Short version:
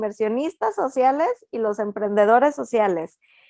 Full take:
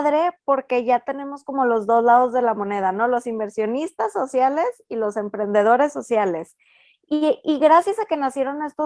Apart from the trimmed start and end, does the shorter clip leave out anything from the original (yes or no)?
no